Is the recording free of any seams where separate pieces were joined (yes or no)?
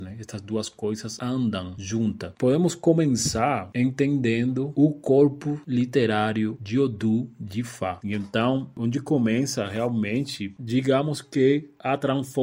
no